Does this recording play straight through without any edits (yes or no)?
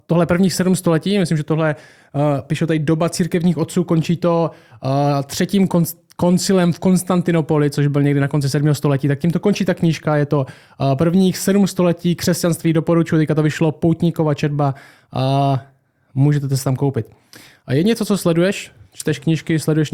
yes